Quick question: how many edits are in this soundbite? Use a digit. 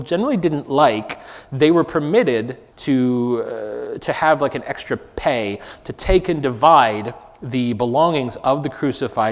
1